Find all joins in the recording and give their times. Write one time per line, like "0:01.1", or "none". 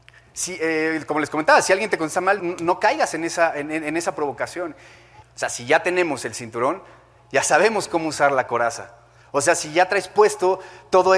0:02.4
0:05.2